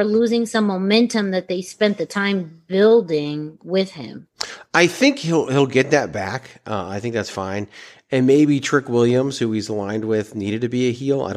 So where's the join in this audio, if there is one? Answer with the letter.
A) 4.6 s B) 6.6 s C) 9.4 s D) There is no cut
D